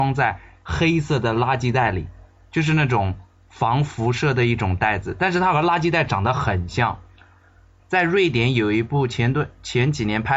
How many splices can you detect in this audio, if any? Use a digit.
1